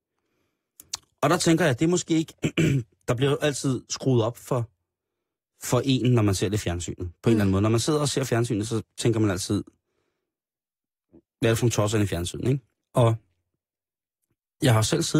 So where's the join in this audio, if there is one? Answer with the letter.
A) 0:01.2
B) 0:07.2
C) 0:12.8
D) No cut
C